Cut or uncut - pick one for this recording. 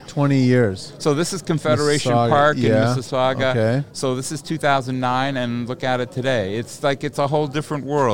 uncut